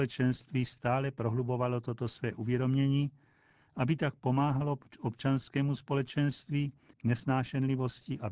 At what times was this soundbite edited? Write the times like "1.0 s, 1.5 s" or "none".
6.9 s